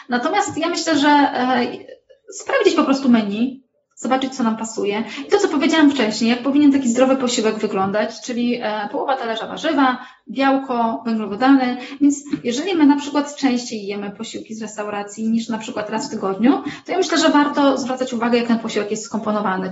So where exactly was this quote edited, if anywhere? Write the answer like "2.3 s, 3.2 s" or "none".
none